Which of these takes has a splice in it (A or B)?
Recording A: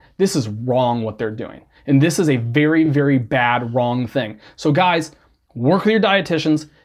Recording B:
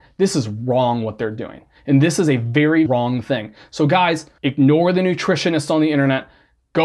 B